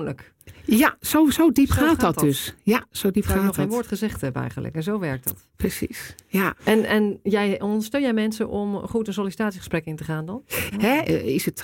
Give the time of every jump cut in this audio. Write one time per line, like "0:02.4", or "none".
0:06.6
0:07.6
0:10.7